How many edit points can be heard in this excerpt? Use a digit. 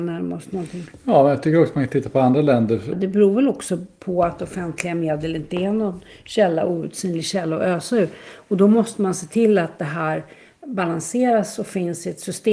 1